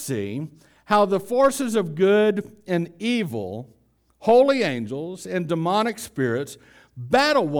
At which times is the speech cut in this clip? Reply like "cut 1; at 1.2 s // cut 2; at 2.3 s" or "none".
none